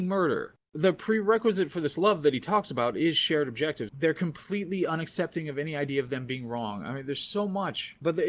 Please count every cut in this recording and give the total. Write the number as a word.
one